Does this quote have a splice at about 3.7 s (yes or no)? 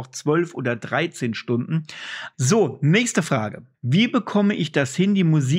yes